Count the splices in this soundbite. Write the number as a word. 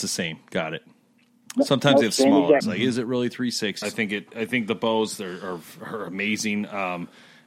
two